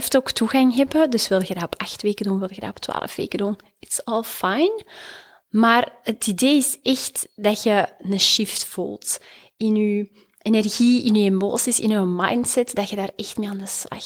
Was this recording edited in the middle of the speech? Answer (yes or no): no